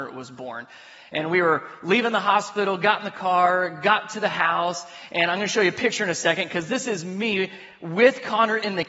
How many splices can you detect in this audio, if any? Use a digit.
0